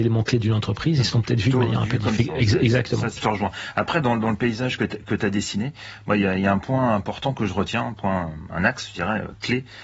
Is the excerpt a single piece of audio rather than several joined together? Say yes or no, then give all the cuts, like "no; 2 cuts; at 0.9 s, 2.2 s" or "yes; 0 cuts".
no; 2 cuts; at 2.2 s, 3.2 s